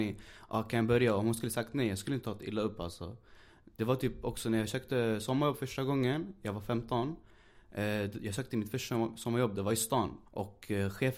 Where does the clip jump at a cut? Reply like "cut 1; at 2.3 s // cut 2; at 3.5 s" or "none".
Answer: cut 1; at 10.3 s

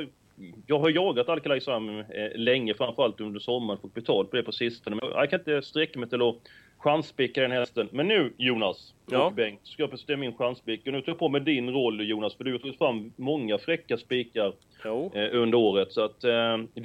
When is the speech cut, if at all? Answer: cut 1; at 5.0 s

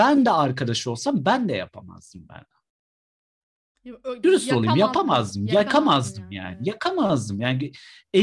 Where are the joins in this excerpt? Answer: none

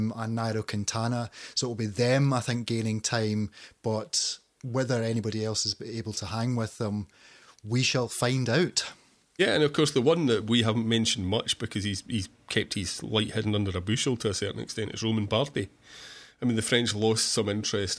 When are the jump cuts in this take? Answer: none

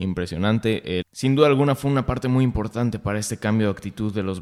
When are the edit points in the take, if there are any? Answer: cut 1; at 1.0 s

